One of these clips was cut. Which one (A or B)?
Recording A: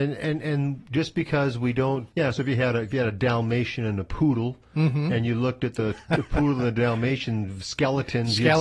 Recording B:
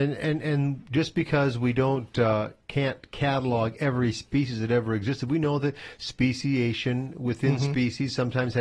A